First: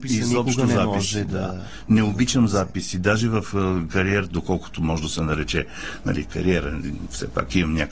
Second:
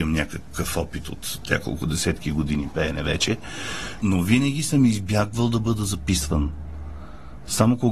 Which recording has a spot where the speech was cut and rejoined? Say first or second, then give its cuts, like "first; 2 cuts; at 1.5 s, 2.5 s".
second; 1 cut; at 4.0 s